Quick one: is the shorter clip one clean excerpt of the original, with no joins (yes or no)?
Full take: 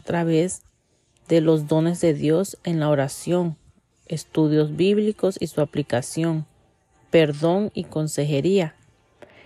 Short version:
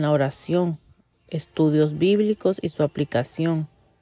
yes